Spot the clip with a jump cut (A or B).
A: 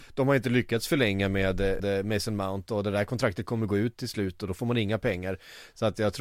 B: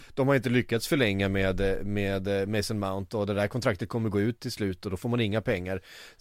A